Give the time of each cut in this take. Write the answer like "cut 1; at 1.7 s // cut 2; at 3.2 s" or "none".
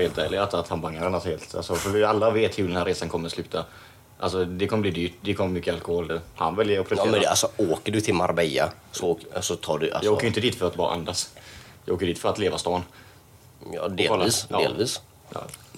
cut 1; at 6.1 s